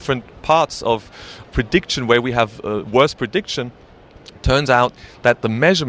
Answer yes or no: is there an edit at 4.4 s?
no